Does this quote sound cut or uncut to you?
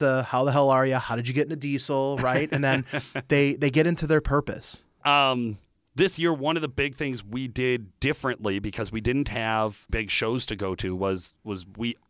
cut